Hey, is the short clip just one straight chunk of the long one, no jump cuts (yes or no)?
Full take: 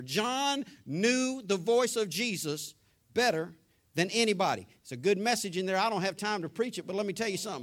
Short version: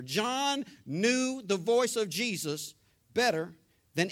yes